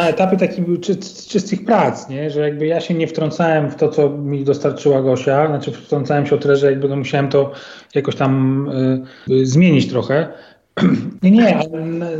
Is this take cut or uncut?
cut